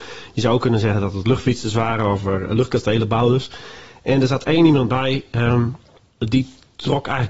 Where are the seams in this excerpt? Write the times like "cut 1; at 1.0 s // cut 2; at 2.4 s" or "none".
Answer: none

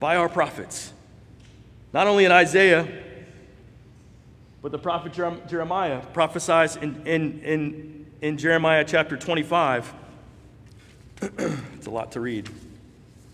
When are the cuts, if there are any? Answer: cut 1; at 10.8 s

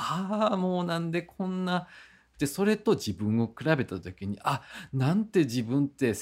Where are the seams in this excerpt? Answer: cut 1; at 2.3 s

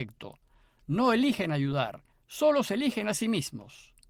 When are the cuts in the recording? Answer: cut 1; at 2.1 s

